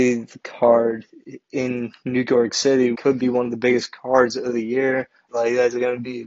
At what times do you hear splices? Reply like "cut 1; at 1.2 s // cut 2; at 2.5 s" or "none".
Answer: cut 1; at 2.9 s // cut 2; at 5.3 s